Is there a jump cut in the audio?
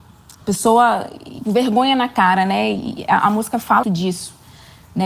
yes; 2 cuts; at 1.4 s, 3.8 s

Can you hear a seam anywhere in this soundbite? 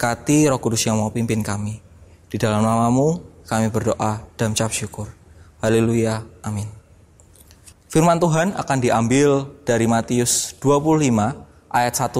yes; 1 cut; at 7.7 s

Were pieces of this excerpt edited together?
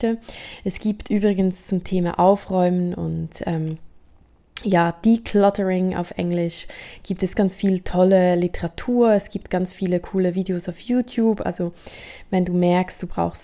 yes; 1 cut; at 7.3 s

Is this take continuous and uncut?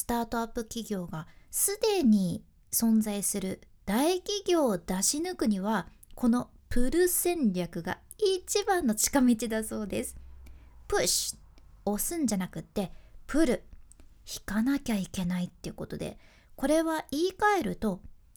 yes; 0 cuts

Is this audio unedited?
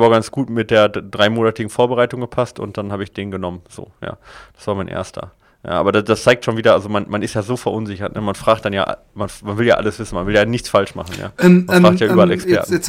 yes; 0 cuts

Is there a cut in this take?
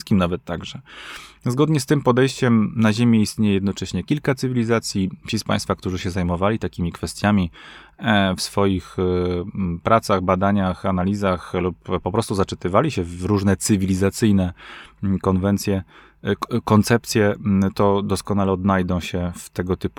no; 0 cuts

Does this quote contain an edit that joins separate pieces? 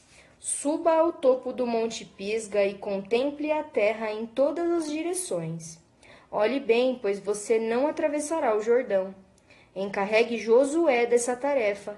no; 0 cuts

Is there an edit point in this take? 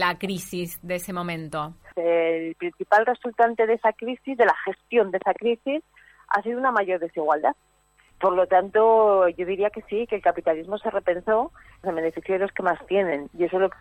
yes; 3 cuts; at 1.9 s, 8.1 s, 11.8 s

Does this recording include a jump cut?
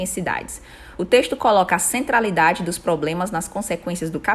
no; 0 cuts

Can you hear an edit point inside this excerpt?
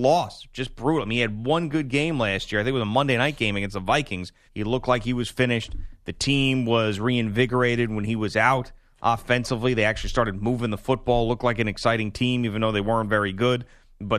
yes; 1 cut; at 4.5 s

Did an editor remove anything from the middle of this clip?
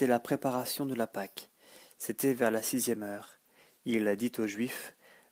no; 0 cuts

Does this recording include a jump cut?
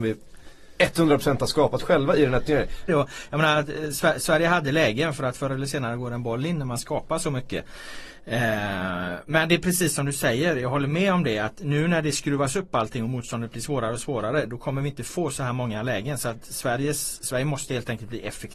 yes; 1 cut; at 2.9 s

